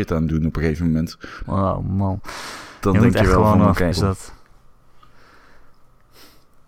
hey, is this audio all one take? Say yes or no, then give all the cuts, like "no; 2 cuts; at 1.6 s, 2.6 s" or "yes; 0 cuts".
no; 2 cuts; at 1.4 s, 3.9 s